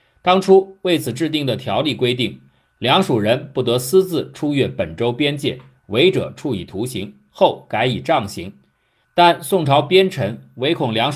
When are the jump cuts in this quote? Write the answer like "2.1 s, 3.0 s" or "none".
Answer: none